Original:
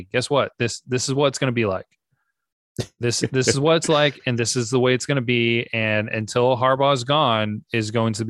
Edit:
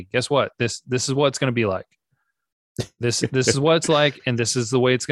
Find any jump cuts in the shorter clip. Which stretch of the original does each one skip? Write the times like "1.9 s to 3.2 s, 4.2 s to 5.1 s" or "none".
none